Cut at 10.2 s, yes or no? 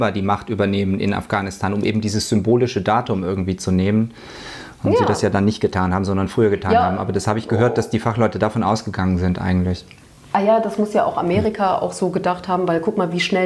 no